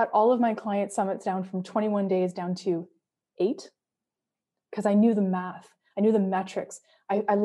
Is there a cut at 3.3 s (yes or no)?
no